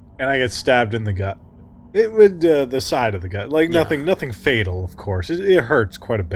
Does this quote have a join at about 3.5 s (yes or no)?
no